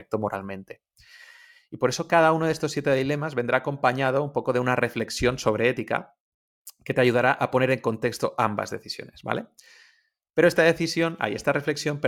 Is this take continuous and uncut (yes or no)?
yes